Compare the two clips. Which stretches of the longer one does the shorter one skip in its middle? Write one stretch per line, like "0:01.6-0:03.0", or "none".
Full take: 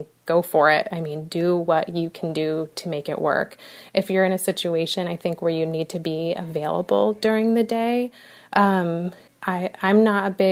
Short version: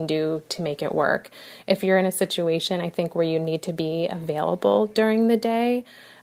none